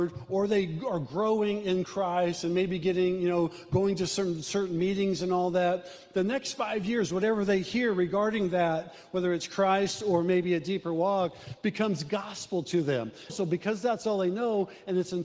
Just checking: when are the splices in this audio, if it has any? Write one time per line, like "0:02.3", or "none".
0:13.3